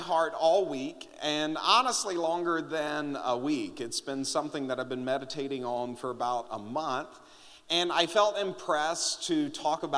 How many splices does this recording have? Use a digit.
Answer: 0